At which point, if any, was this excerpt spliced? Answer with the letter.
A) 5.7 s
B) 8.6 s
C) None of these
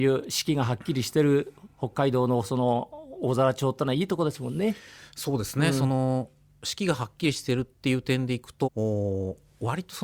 B